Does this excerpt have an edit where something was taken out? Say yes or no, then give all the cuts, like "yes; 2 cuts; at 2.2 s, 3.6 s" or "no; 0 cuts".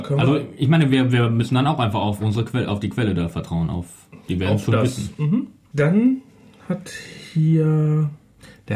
yes; 1 cut; at 5.7 s